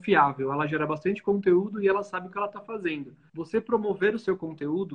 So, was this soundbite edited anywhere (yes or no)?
yes